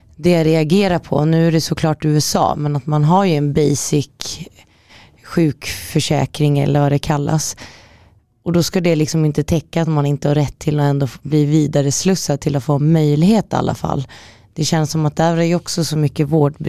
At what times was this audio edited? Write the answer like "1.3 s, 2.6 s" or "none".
none